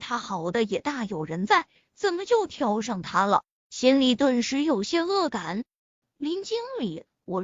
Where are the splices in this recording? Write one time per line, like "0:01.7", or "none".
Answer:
0:06.0